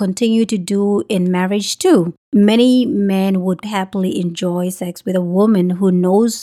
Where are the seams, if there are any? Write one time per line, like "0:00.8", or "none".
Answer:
0:02.2
0:03.6